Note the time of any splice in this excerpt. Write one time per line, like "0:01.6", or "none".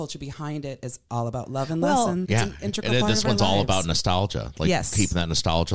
0:02.2